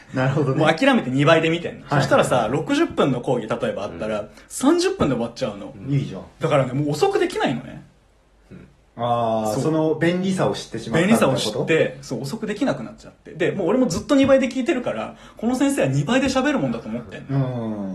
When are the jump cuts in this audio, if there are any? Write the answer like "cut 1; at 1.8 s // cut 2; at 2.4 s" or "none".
none